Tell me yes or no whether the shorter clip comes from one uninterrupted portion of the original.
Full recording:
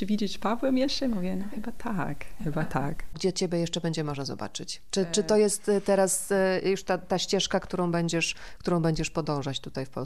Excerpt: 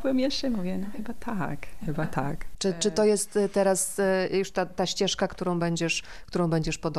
no